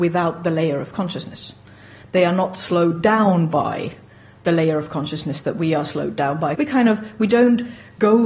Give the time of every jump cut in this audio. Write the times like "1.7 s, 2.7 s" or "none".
6.5 s